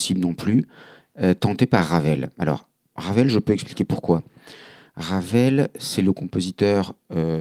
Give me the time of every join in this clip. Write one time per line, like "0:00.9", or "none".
none